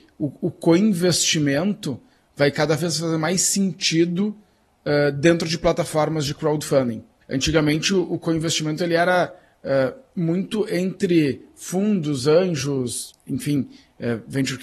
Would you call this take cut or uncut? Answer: cut